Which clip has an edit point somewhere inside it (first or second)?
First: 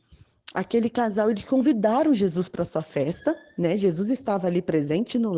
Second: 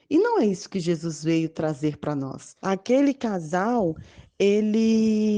second